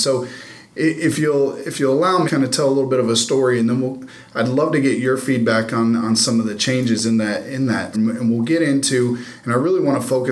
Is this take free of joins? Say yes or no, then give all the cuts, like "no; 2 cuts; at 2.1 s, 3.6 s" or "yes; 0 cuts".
no; 2 cuts; at 2.3 s, 7.9 s